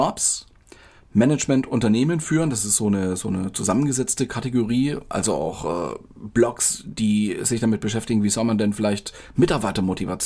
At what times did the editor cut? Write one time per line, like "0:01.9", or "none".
none